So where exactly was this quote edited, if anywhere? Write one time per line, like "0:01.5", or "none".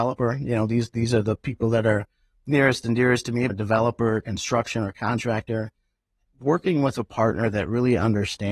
0:03.5